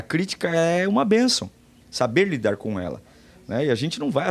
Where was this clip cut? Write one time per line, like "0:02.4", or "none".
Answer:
none